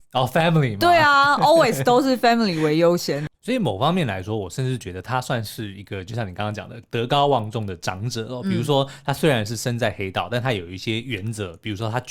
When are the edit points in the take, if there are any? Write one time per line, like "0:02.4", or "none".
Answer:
none